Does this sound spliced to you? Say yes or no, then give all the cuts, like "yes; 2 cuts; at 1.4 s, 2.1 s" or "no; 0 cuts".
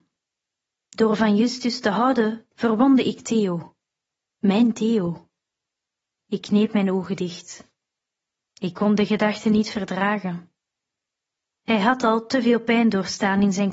no; 0 cuts